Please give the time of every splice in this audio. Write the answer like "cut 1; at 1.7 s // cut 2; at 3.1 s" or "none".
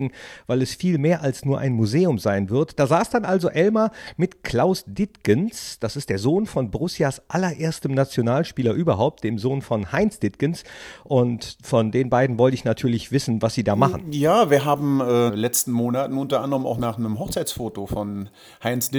cut 1; at 15.3 s